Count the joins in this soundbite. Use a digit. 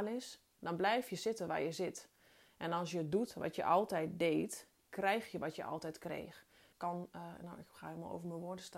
1